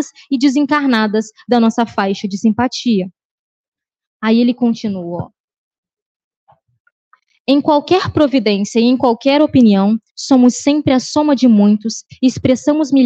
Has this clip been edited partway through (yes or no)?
no